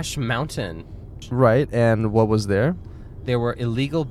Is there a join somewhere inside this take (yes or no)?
no